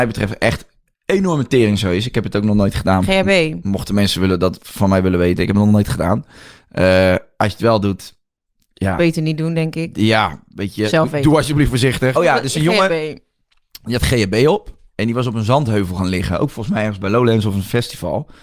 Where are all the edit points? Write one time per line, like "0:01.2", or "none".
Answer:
0:12.1